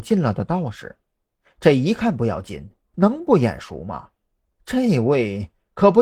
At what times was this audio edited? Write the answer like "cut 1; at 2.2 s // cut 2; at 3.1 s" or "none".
cut 1; at 2.9 s